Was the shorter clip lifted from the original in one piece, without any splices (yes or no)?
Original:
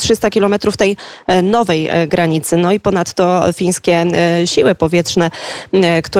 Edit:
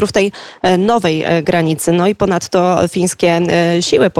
yes